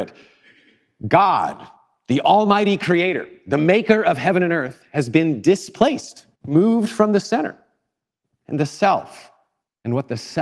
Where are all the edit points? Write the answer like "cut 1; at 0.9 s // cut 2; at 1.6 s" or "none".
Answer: cut 1; at 6.3 s